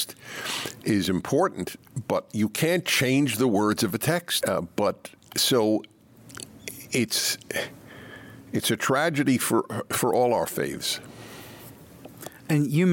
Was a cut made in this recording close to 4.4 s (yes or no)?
yes